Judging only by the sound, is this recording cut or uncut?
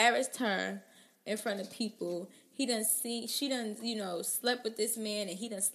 uncut